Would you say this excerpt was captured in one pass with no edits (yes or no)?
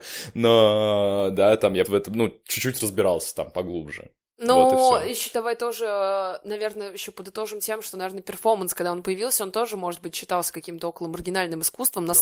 no